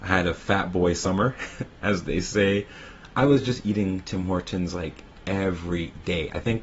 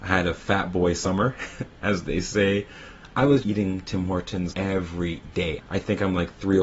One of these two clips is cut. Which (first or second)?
second